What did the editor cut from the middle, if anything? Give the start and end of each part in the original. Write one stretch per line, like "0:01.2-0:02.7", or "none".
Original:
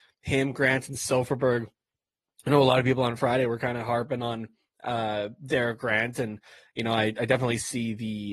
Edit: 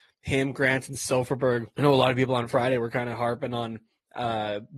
0:01.7-0:02.4